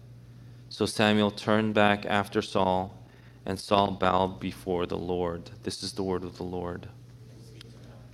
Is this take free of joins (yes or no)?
yes